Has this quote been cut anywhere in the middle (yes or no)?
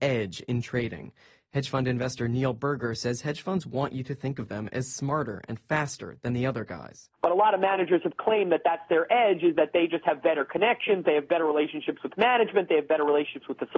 no